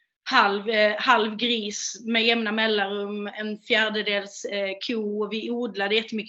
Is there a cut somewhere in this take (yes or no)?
no